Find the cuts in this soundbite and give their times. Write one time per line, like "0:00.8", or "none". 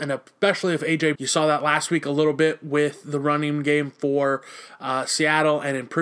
0:01.1